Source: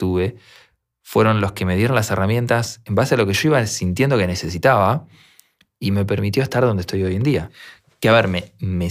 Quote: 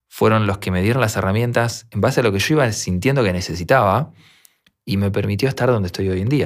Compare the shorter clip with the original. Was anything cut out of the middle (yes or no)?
no